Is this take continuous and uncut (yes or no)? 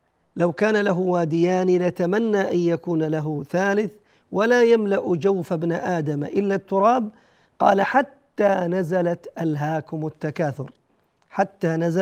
yes